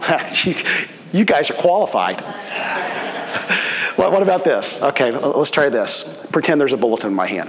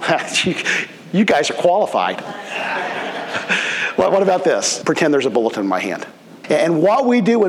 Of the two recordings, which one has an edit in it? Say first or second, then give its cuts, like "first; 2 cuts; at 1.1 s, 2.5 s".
second; 2 cuts; at 4.8 s, 6.4 s